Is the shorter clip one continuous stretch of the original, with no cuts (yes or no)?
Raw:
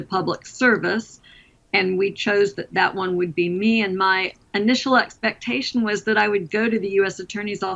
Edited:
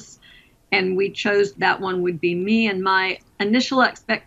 no